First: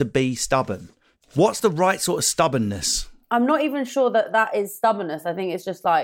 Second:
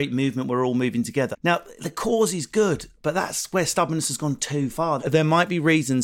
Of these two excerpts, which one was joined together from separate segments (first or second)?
second